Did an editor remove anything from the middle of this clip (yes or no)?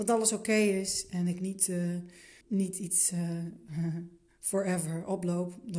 yes